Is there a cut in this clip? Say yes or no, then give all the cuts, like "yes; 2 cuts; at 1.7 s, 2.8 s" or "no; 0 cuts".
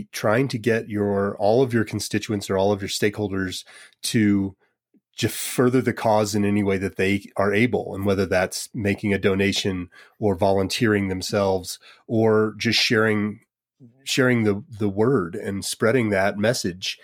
no; 0 cuts